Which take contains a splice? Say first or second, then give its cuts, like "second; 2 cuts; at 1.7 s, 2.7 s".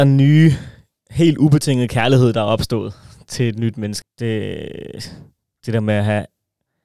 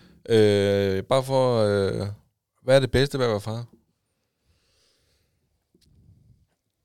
first; 1 cut; at 4.0 s